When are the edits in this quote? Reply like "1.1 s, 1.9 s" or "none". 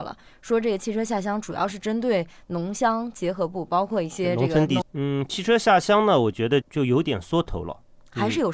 4.8 s, 6.6 s